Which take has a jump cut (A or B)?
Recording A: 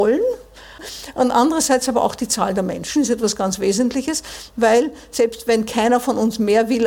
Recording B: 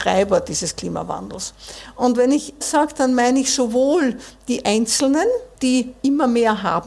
B